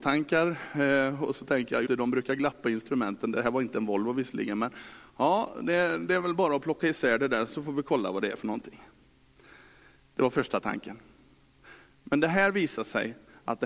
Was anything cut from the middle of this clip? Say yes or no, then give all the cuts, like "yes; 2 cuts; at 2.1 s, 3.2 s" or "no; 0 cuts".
yes; 1 cut; at 1.9 s